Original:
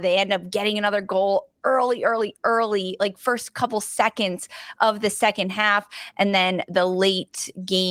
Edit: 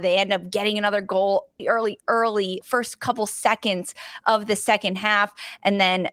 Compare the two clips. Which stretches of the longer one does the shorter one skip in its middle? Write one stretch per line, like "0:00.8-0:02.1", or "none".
0:01.6-0:02.0
0:03.0-0:03.1